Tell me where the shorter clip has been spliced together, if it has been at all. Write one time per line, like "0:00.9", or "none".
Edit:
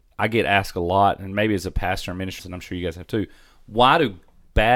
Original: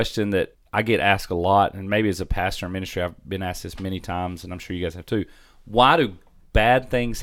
0:02.4